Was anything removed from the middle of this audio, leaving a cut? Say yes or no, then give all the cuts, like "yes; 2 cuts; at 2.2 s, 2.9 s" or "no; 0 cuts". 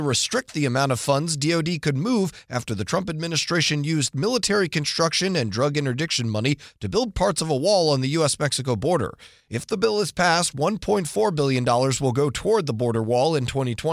no; 0 cuts